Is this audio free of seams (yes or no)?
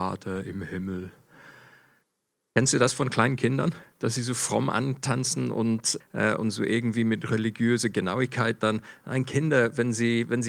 no